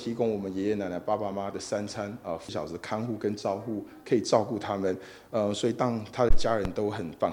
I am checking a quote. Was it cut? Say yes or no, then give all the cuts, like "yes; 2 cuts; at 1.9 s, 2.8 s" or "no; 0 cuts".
yes; 1 cut; at 1.3 s